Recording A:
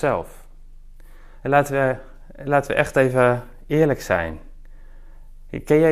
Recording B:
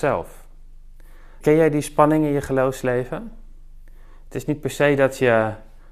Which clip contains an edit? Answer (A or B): B